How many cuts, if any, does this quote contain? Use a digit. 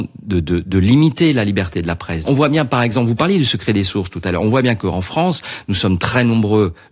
1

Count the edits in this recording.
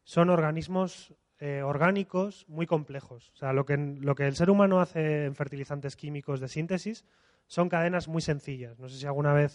0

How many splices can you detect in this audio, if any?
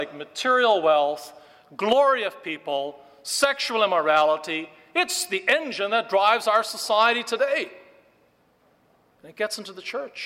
0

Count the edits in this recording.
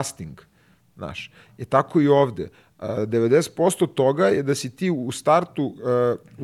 0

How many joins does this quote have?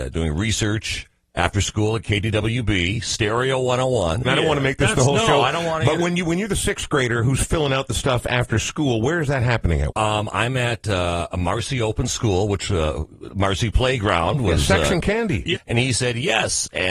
3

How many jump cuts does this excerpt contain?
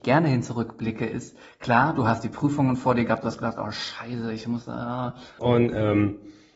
1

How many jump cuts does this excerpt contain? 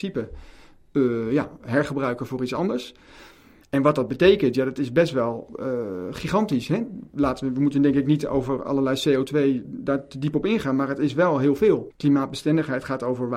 2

